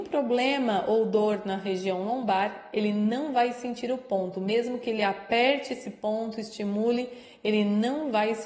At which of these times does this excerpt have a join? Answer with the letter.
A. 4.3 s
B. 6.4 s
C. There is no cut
C